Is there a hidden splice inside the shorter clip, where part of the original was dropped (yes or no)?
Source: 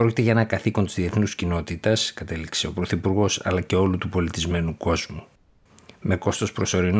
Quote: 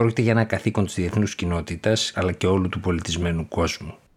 yes